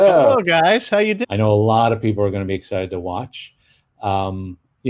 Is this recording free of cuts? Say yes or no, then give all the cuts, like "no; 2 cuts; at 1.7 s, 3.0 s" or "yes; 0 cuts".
no; 1 cut; at 1.2 s